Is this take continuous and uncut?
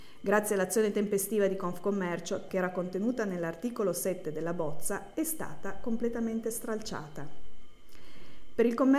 no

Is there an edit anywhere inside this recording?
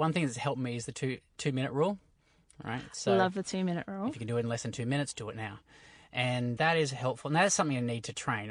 yes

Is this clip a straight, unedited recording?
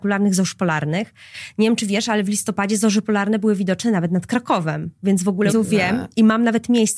no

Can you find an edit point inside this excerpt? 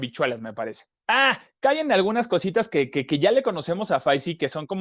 yes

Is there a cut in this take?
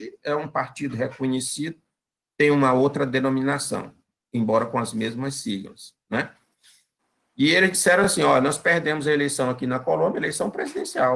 no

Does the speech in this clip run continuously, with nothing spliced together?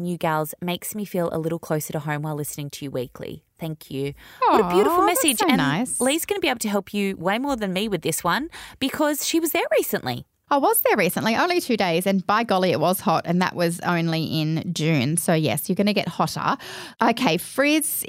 yes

